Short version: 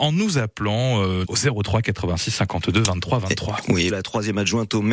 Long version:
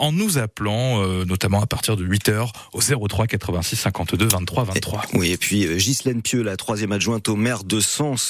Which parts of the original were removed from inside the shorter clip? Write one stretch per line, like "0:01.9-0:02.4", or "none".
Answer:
0:01.2-0:02.7
0:05.3-0:06.4

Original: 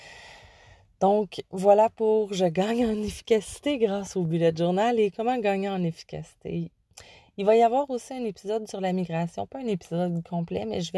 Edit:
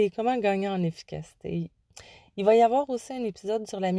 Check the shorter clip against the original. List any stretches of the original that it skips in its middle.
none

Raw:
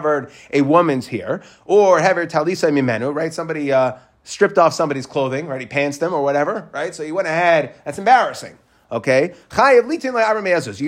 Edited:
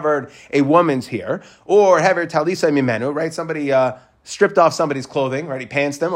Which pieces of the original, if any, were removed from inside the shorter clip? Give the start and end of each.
none

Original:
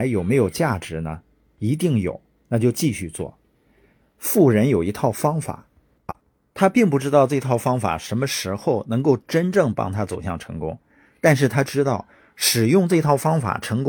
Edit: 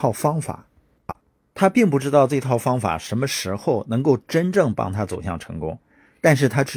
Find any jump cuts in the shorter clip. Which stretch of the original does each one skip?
none

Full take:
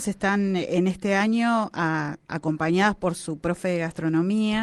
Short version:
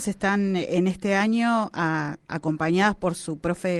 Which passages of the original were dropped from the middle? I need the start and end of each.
none

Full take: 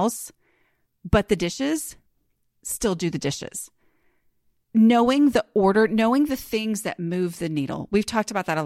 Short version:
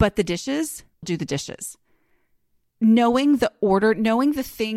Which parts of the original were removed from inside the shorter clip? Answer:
0:02.2-0:03.0

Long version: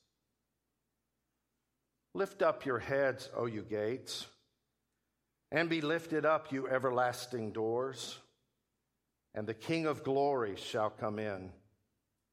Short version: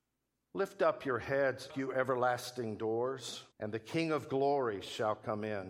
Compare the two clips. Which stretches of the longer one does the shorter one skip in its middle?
0:03.3-0:06.4
0:08.3-0:09.3

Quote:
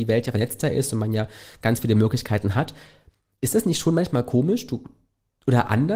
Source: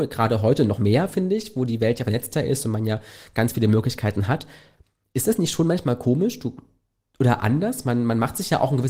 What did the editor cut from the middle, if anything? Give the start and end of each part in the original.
none

